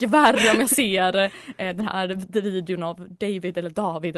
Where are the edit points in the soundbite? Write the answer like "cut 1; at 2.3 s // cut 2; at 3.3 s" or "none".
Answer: none